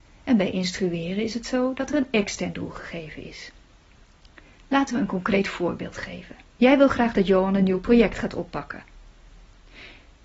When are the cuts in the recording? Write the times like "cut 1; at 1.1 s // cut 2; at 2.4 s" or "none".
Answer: cut 1; at 6.6 s